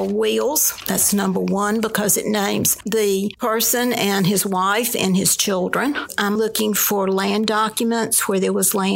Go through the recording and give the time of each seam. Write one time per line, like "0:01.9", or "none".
0:06.4